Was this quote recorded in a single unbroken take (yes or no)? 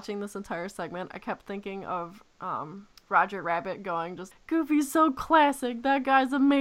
no